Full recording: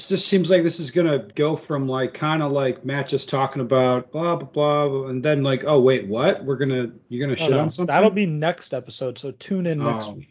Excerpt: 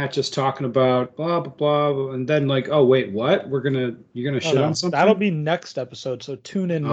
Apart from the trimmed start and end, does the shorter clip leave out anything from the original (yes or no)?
no